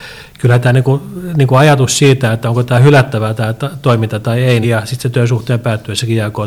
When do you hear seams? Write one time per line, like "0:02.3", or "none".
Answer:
0:04.6